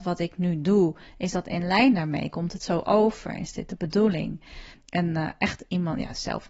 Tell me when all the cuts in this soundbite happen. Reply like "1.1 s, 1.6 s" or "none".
4.7 s